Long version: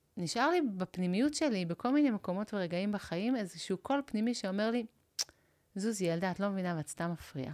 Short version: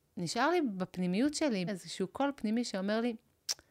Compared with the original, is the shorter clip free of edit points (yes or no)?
no